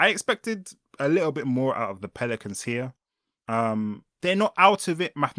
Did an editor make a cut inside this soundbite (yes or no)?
no